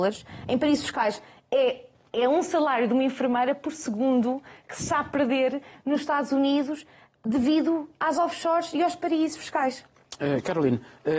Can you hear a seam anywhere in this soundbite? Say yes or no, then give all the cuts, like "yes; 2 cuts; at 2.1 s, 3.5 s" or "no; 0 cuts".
no; 0 cuts